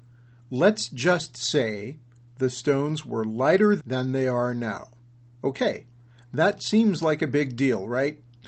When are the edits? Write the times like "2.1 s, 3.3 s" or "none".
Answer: 3.8 s, 5.4 s